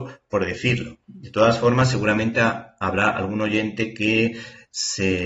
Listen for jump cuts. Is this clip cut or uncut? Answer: cut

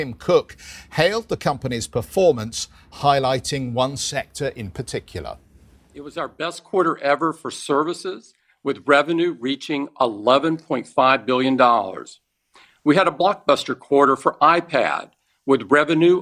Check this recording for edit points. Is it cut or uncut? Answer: uncut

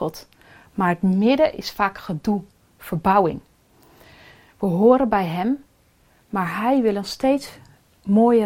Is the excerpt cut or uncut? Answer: uncut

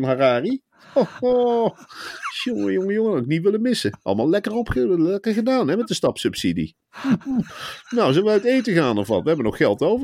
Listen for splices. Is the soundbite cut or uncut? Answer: uncut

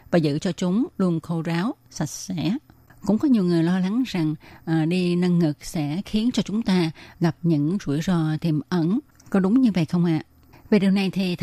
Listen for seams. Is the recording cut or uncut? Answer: uncut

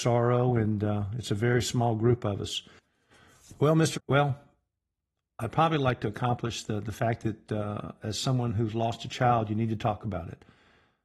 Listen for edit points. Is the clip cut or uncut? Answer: cut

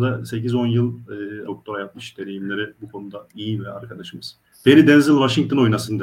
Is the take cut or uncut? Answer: cut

